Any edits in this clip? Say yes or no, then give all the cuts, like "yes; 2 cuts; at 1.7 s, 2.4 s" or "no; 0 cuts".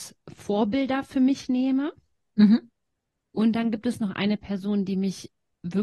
no; 0 cuts